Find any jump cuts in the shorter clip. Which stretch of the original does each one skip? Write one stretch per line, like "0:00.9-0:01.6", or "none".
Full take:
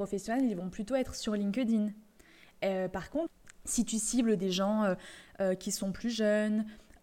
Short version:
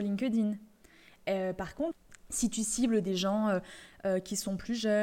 none